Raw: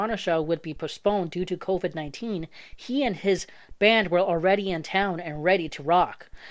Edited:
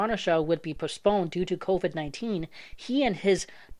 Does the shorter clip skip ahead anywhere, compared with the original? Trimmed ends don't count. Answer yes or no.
no